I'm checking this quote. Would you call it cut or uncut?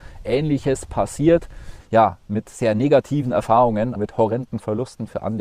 cut